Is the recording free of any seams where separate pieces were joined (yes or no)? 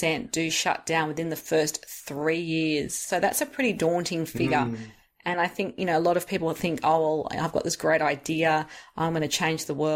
yes